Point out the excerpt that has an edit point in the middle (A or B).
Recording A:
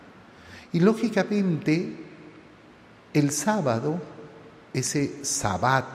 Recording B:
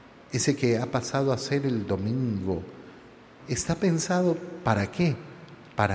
B